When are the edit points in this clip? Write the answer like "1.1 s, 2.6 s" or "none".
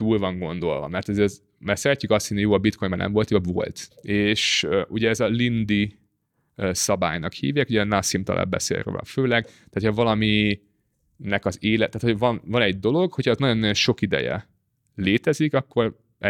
3.9 s